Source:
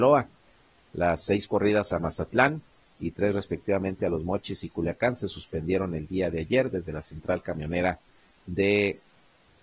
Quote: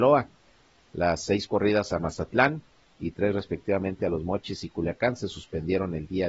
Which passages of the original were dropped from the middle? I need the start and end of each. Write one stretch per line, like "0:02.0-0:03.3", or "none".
none